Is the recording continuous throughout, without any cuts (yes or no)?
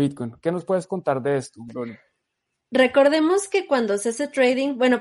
yes